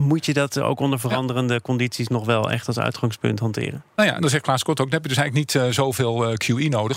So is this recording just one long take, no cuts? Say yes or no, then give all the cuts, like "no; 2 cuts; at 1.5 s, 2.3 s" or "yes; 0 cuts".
no; 1 cut; at 4.2 s